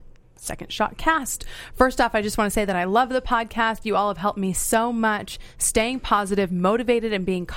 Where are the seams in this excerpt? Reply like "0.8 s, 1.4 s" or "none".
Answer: none